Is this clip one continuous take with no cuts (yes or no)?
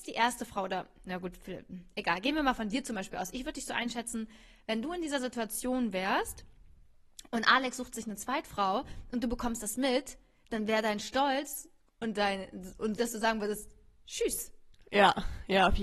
no